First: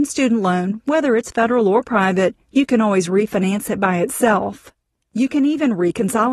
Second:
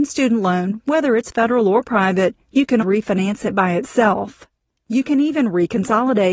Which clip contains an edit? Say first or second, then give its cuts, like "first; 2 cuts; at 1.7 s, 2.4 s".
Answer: second; 1 cut; at 2.8 s